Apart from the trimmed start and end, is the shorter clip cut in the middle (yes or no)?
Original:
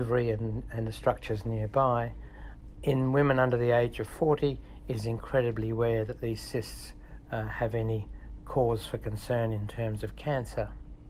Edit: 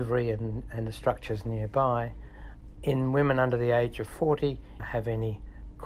yes